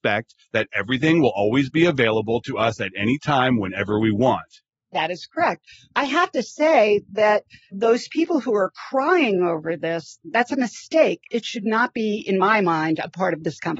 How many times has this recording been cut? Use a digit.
0